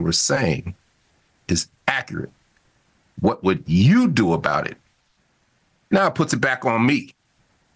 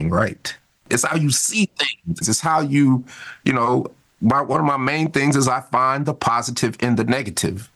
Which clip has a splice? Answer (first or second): second